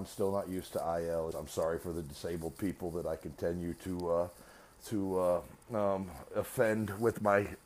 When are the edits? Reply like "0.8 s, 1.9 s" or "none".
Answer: 1.3 s